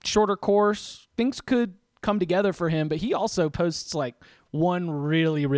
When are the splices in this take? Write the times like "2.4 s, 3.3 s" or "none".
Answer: 1.1 s